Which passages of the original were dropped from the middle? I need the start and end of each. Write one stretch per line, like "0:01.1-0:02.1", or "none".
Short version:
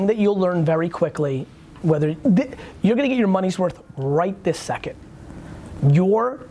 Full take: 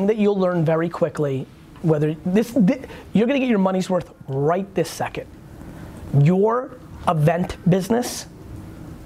0:02.2-0:02.5